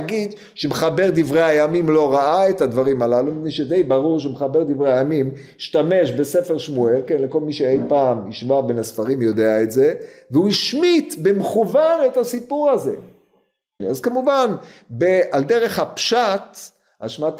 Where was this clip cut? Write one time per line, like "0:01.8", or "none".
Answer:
0:13.8